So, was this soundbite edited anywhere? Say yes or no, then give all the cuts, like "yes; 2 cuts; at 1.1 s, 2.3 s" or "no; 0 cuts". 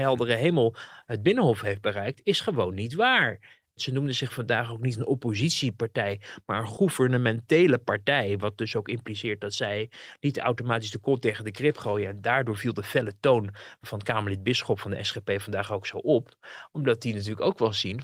yes; 1 cut; at 3.8 s